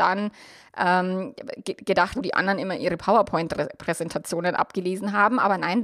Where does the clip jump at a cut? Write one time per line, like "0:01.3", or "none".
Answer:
0:02.2